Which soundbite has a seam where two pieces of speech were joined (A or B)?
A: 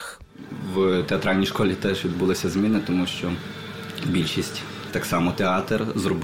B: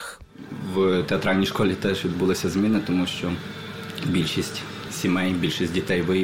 A